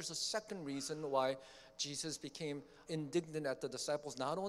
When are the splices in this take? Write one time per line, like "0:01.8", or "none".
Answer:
0:02.9